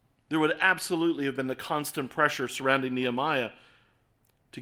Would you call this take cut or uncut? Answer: uncut